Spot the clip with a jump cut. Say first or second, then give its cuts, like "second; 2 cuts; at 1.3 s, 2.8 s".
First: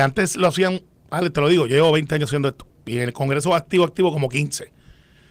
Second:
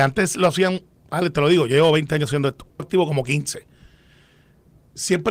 second; 1 cut; at 2.8 s